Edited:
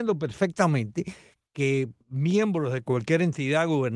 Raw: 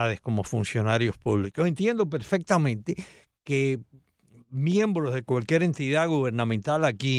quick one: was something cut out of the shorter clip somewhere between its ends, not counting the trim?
yes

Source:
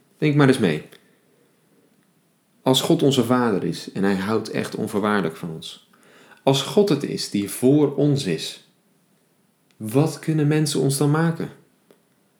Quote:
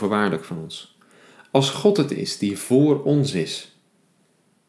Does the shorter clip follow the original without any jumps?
yes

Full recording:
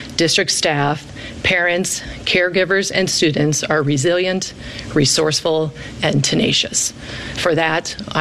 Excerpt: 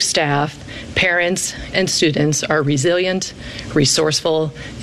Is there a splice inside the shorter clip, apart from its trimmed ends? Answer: yes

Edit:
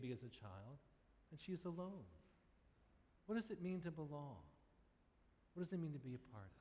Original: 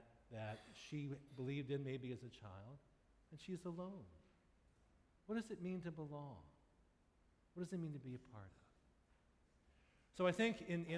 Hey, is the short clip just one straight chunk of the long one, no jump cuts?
yes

